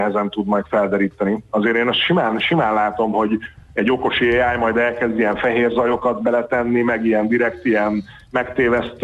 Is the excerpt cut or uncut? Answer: uncut